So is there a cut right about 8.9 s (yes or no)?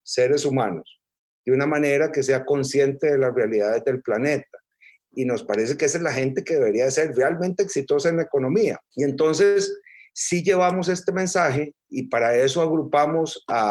yes